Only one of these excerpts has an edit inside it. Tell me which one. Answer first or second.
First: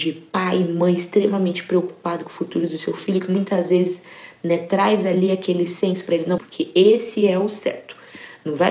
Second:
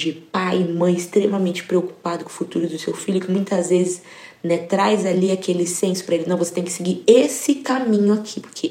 first